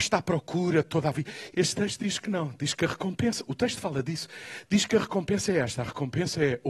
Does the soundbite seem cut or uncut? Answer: cut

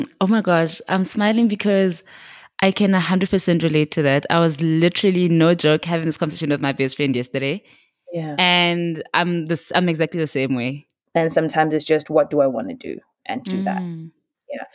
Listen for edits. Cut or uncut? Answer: cut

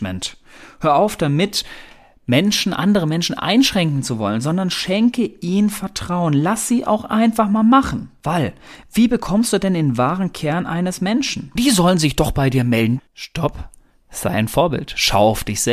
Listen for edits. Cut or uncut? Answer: cut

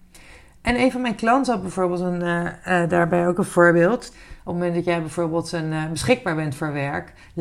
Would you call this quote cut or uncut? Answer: cut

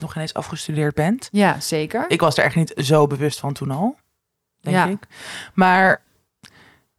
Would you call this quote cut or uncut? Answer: uncut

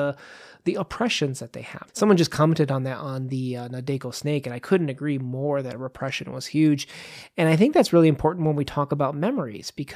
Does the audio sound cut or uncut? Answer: cut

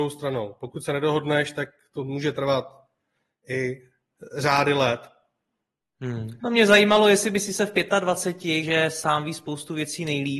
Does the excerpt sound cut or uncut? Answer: cut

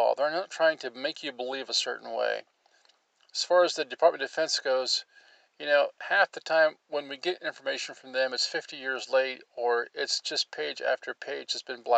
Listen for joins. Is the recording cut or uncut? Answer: uncut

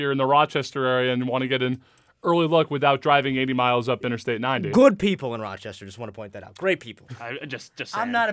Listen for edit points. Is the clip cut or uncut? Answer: cut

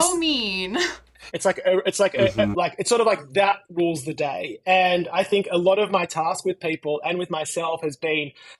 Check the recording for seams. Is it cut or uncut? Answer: cut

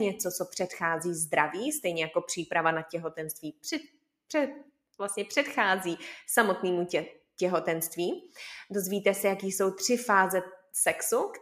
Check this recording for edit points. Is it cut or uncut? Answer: uncut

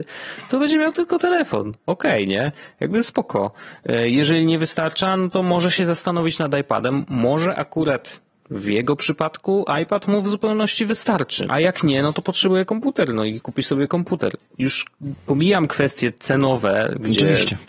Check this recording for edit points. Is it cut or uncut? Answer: cut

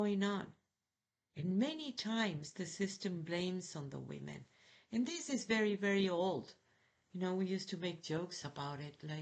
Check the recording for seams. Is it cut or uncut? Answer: uncut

